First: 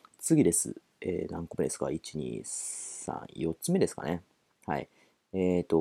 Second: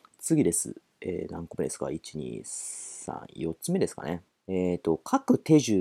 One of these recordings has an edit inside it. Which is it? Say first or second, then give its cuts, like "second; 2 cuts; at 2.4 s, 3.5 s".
second; 1 cut; at 4.3 s